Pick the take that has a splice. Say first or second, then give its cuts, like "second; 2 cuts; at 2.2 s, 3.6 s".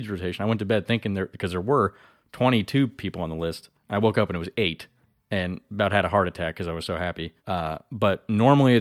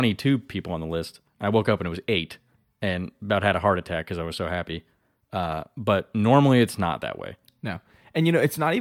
first; 1 cut; at 7.4 s